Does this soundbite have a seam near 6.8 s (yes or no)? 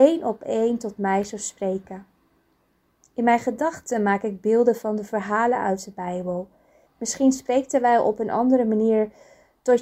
yes